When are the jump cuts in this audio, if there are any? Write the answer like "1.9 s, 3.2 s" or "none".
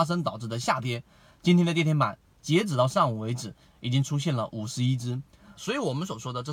5.6 s